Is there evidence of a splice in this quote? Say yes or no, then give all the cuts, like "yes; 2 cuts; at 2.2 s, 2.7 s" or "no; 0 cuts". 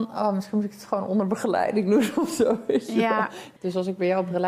yes; 1 cut; at 3.6 s